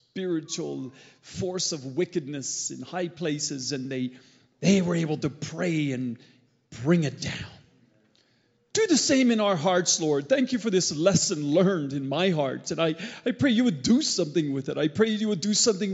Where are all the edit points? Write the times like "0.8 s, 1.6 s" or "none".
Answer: none